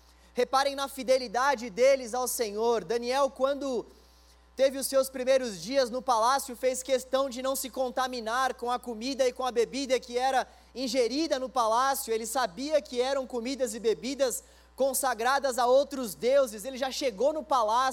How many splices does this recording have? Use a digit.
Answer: 0